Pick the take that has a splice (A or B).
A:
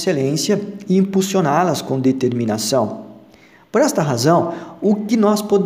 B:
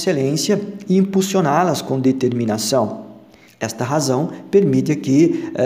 B